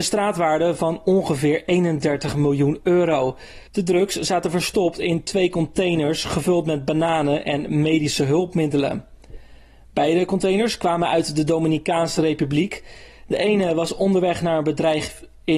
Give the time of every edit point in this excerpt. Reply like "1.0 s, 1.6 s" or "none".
3.7 s